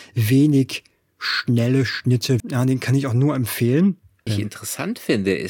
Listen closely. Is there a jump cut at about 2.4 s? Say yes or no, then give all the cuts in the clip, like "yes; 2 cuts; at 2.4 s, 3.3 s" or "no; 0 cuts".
yes; 2 cuts; at 2.4 s, 4.3 s